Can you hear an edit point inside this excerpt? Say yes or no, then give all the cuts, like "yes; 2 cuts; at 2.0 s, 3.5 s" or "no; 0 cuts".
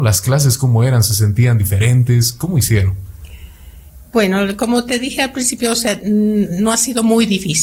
no; 0 cuts